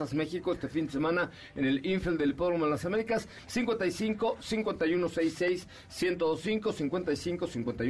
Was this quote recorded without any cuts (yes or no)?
no